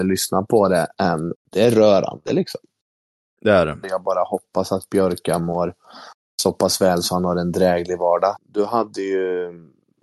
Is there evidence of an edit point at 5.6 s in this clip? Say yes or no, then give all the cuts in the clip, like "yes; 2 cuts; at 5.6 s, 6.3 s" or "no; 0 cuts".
no; 3 cuts; at 1.3 s, 3.8 s, 8.4 s